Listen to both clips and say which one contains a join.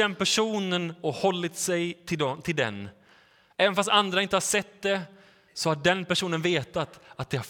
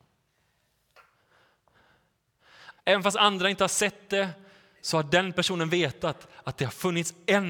second; 1 cut; at 2.7 s

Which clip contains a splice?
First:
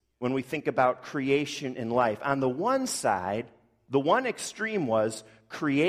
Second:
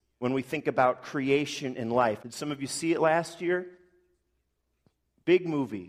second; 1 cut; at 2.2 s

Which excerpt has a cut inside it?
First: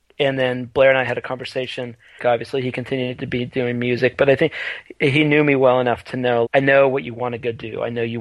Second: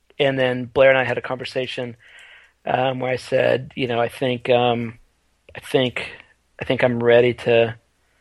first; 2 cuts; at 2.2 s, 6.5 s

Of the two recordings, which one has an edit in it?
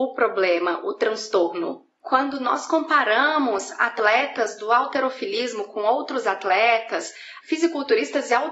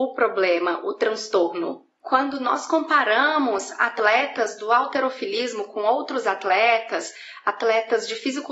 first; 1 cut; at 7.4 s

